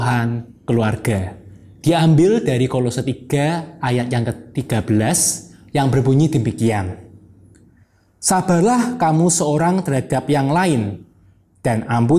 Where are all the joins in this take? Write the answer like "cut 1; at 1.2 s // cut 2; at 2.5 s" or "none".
none